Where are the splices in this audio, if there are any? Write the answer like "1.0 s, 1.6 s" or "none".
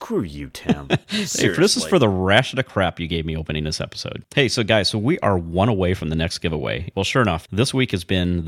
4.2 s, 6.9 s